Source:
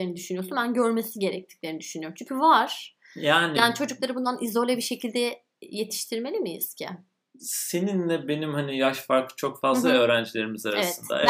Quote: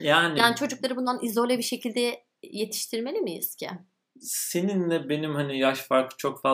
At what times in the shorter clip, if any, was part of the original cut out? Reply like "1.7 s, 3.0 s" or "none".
none